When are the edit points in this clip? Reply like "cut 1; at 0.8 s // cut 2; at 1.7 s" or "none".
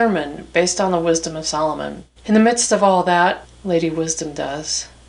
cut 1; at 2.2 s // cut 2; at 3.4 s